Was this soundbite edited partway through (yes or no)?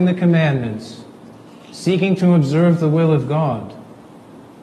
no